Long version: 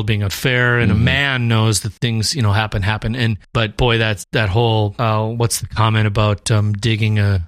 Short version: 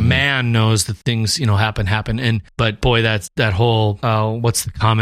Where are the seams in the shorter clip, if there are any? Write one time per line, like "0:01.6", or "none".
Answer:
none

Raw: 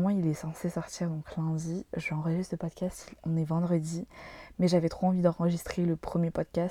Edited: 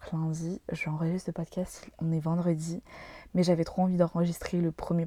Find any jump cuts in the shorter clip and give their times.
none

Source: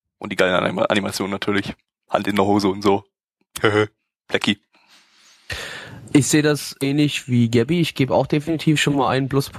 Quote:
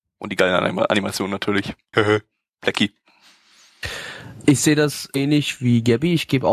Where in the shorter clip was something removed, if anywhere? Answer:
0:01.9

